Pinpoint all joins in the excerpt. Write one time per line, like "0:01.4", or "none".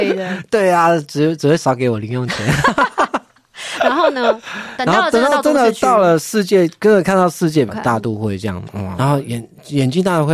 0:07.7
0:09.0